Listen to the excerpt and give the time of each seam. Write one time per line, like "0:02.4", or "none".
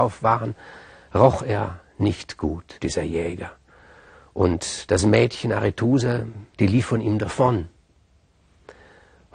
0:02.7
0:06.5